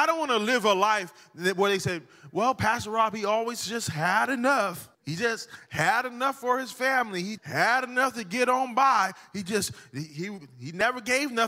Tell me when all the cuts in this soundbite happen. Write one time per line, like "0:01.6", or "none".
0:04.9
0:07.4